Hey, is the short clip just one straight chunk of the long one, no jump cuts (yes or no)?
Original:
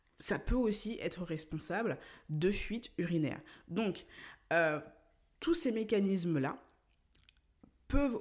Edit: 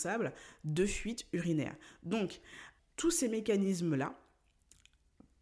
no